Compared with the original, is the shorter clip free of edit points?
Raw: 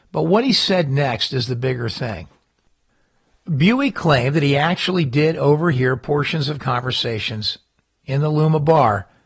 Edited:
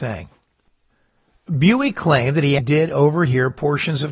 no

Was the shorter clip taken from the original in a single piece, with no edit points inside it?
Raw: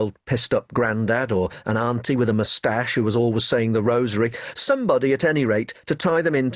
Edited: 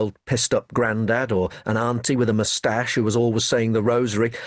yes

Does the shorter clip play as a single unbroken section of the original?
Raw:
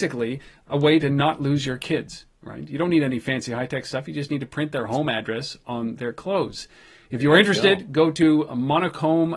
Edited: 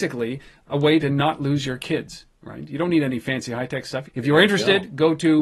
no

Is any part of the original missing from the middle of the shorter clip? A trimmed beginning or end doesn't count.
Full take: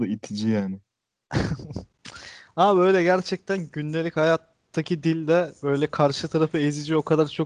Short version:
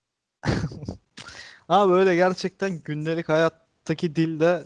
no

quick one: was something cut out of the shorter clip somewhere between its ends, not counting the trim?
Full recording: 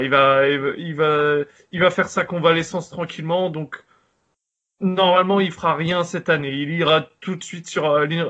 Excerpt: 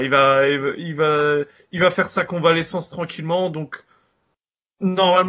no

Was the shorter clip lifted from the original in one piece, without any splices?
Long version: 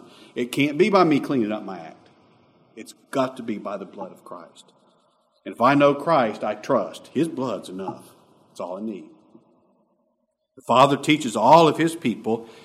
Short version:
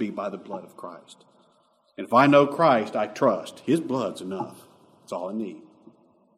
yes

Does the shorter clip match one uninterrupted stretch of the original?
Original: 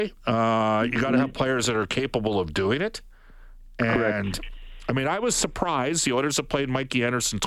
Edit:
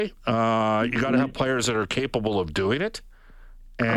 yes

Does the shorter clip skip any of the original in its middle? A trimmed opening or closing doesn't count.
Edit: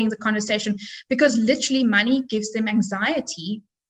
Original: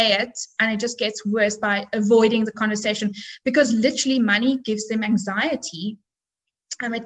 no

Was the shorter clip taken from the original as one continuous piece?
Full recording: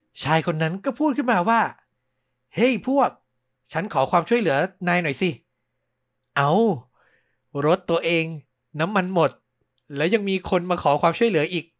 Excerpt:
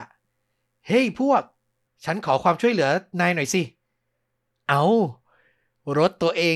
yes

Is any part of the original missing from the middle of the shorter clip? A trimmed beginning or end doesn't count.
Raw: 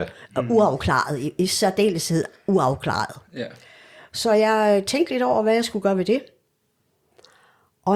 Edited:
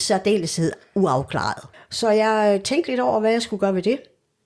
yes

